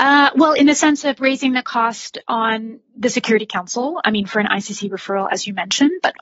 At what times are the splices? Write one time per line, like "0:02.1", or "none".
none